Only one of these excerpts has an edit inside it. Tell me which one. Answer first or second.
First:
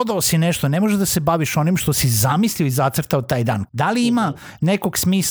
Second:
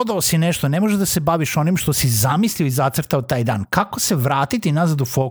first